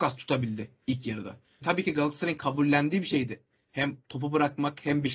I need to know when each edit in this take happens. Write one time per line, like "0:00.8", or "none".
0:01.6